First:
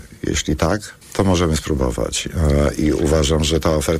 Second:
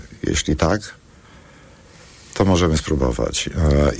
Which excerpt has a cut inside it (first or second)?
first